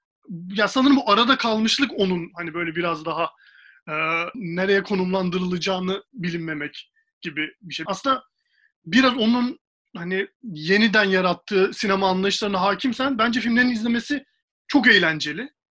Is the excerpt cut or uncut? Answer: cut